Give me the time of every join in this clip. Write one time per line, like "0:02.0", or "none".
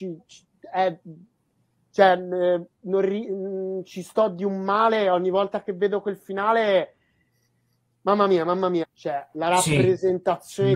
0:08.8

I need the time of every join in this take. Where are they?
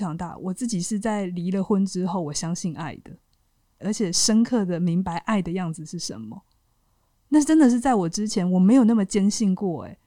0:03.8

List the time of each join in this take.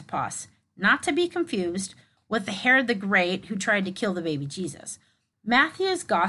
0:05.3

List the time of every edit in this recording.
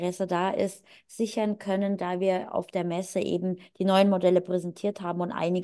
none

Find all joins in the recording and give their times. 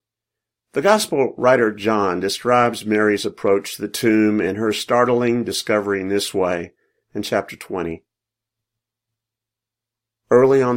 none

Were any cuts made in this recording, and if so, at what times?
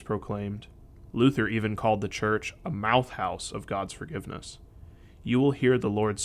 0:01.1

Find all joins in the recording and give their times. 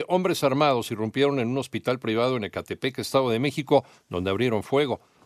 none

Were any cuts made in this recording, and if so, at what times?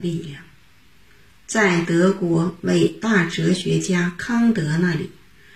none

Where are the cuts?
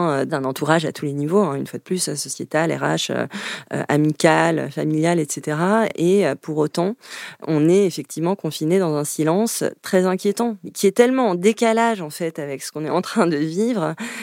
none

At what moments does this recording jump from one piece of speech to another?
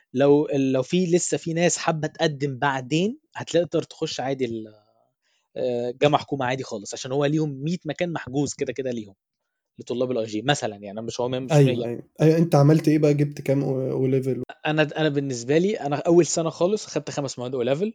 0:12.1
0:14.5

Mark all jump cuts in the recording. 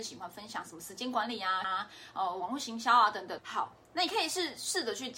0:01.6
0:03.4

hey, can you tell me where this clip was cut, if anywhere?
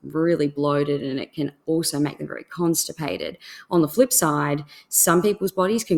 none

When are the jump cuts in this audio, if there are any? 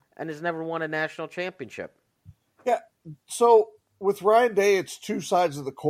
none

